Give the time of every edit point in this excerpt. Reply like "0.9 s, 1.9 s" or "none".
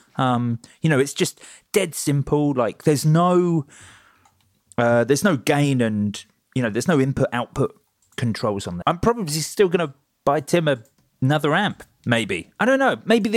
8.8 s